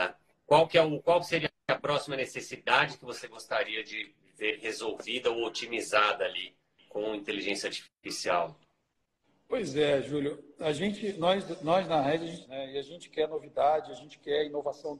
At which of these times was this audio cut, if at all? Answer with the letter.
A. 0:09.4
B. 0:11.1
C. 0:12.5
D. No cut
C